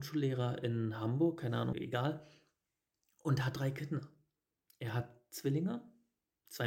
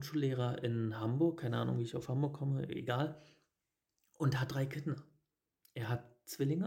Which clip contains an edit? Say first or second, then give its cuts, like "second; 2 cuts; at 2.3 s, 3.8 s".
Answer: first; 1 cut; at 1.7 s